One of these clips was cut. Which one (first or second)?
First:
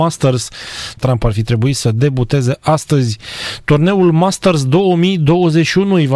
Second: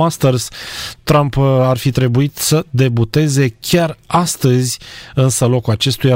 first